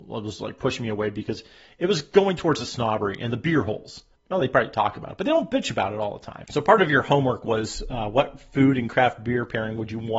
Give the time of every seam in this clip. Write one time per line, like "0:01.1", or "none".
0:04.1
0:06.4